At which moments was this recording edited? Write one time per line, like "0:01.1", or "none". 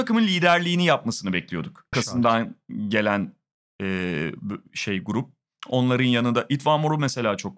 0:01.9